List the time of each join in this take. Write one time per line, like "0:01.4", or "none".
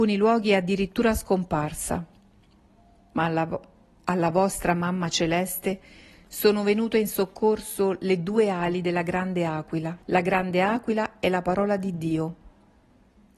0:10.0